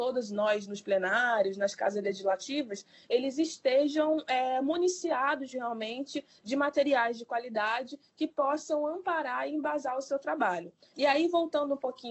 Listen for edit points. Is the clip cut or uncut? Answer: cut